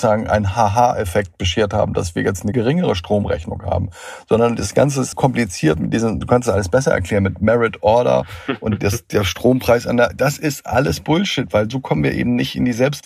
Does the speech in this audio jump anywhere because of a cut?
yes; 1 cut; at 5.1 s

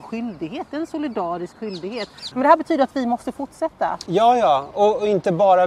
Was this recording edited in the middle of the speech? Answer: yes; 2 cuts; at 2.3 s, 4.1 s

